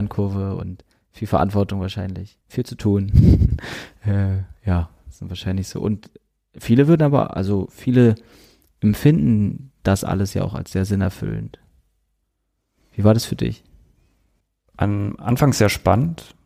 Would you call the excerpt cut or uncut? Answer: cut